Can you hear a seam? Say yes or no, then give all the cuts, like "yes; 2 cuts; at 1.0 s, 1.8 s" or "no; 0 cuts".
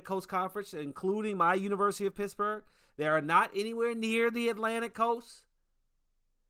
no; 0 cuts